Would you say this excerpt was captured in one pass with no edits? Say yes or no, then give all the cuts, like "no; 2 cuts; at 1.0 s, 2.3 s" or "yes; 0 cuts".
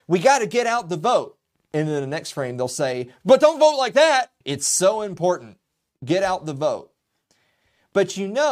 no; 1 cut; at 4.4 s